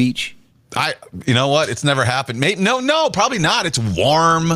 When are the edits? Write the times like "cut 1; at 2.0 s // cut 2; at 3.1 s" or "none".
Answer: none